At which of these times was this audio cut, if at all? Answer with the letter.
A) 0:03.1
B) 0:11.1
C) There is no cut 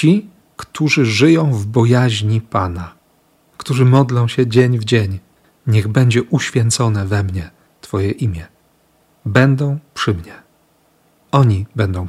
C